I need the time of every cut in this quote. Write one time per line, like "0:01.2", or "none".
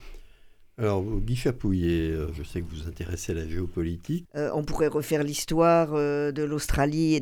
0:04.2